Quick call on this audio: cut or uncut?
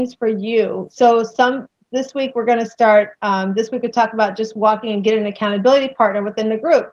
uncut